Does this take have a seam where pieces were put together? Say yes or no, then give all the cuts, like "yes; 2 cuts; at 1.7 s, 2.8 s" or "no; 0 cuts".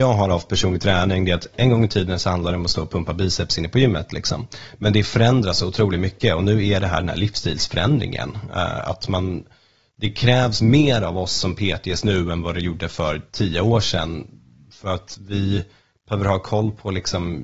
no; 0 cuts